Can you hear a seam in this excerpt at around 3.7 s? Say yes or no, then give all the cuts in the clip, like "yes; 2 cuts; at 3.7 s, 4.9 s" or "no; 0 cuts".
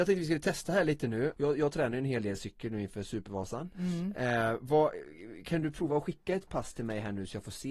no; 1 cut; at 1.3 s